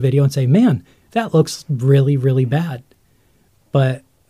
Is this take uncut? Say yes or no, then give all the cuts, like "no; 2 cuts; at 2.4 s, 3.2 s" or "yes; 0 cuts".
yes; 0 cuts